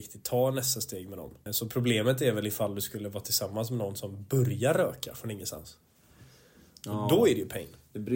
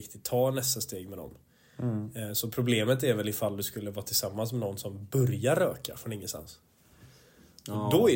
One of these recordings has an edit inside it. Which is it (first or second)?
first